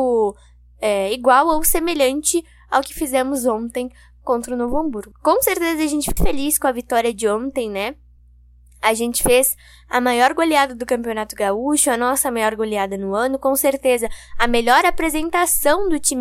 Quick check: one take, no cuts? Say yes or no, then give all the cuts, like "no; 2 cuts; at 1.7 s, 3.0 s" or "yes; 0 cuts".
no; 2 cuts; at 5.1 s, 6.2 s